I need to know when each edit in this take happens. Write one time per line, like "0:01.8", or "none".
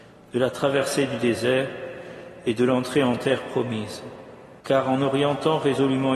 0:04.6

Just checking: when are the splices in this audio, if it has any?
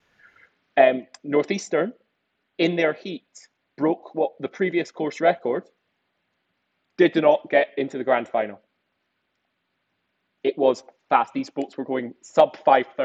none

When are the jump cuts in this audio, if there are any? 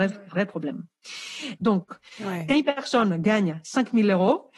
0:01.6

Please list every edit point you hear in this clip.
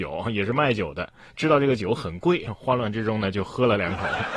none

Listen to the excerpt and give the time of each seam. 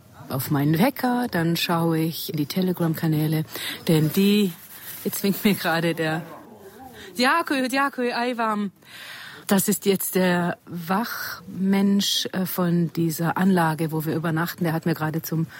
0:09.4

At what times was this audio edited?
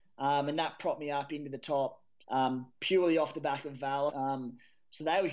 0:02.2
0:04.1

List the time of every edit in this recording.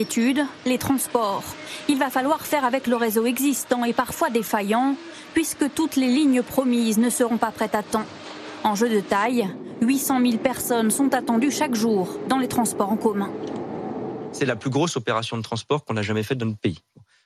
none

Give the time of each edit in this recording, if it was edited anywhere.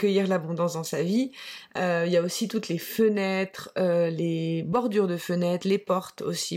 none

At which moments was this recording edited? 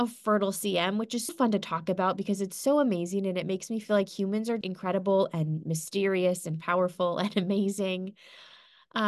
0:01.3
0:04.6

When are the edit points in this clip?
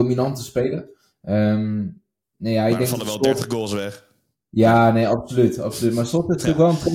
0:02.3

